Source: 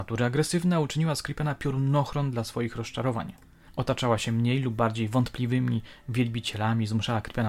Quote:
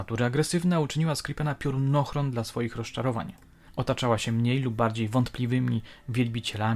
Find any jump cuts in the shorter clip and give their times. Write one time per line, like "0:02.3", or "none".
none